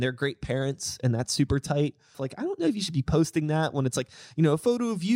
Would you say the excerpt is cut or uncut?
cut